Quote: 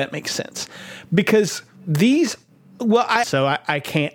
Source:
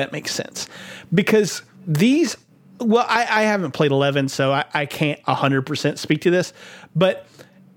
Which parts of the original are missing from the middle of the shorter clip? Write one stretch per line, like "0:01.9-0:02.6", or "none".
0:03.2-0:04.3